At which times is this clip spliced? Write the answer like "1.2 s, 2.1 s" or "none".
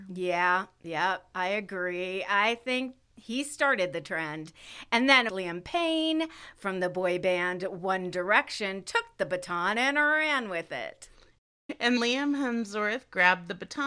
5.3 s, 12.0 s